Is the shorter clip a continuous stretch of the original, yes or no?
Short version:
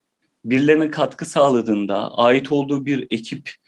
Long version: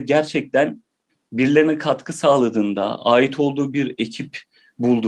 yes